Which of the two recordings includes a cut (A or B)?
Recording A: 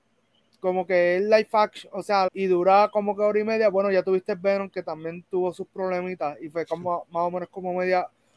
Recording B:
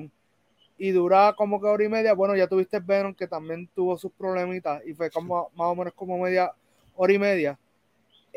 A